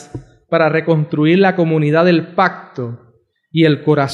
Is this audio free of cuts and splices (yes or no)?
yes